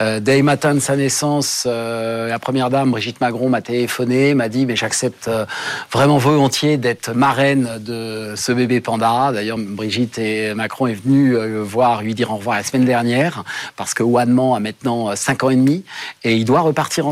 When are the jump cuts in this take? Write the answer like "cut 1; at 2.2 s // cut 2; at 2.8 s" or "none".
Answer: none